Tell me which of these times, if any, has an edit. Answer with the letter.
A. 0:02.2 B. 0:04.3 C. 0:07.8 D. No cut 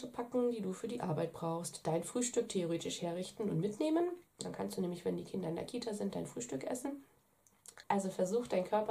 C